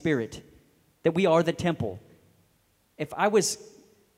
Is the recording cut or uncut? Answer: uncut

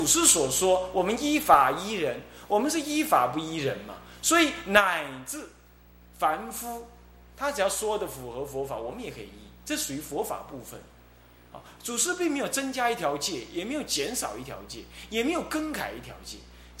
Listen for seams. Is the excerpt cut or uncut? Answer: uncut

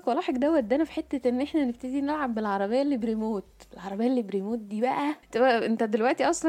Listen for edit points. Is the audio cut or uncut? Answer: cut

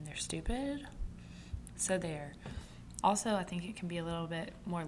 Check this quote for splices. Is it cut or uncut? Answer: cut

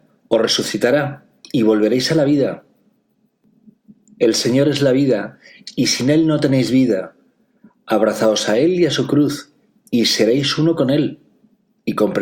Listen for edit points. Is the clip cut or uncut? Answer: uncut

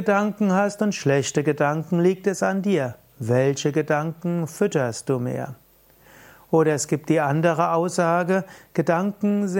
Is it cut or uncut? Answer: uncut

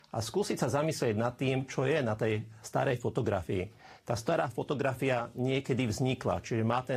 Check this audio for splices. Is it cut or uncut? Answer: uncut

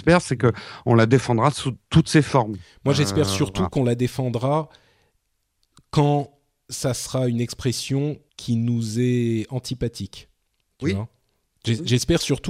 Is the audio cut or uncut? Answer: cut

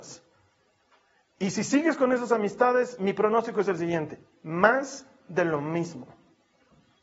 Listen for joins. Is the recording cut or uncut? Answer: uncut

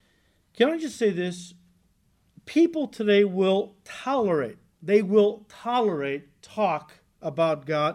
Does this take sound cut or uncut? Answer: uncut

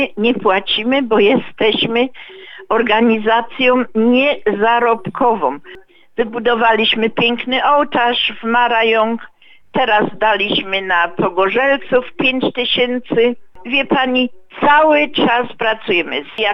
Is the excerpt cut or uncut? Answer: uncut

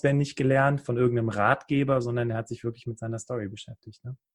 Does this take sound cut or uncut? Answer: uncut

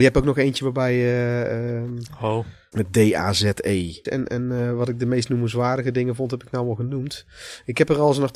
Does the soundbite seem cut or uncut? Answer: cut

